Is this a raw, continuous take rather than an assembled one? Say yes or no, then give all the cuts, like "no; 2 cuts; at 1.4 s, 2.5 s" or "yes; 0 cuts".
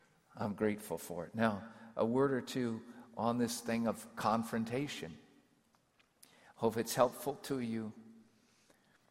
yes; 0 cuts